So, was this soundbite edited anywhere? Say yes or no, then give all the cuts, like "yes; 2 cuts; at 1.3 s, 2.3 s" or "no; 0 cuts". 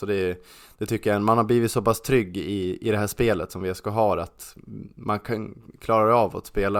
no; 0 cuts